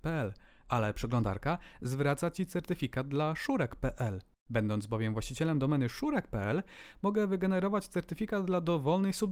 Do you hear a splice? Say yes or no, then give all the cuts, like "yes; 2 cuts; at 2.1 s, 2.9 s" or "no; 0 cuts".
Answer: yes; 1 cut; at 4.3 s